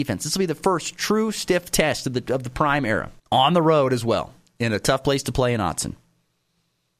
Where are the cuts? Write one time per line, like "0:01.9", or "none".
0:03.2

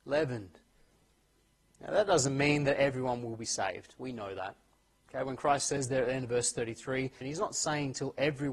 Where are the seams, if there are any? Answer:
0:07.2

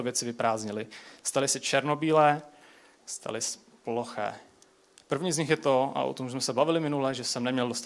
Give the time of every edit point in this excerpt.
0:05.0

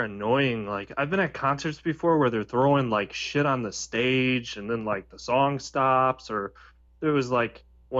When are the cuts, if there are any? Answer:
none

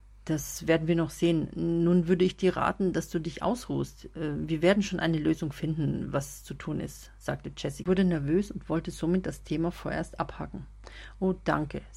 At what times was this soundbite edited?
none

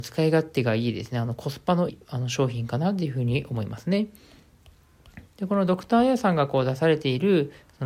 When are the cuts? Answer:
0:01.9
0:05.3

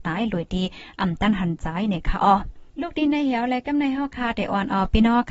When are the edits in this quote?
0:02.7

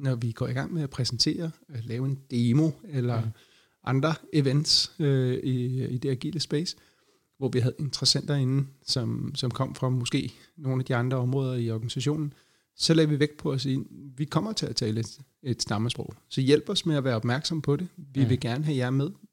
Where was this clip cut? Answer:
none

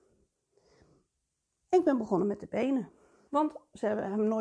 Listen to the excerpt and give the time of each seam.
0:03.3

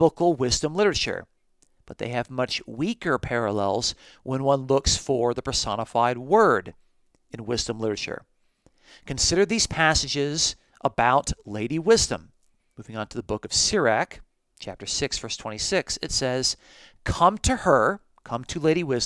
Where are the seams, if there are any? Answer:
0:12.6

